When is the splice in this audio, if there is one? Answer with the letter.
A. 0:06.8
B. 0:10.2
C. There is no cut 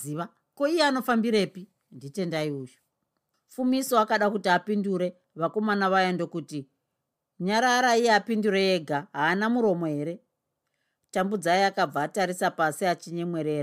C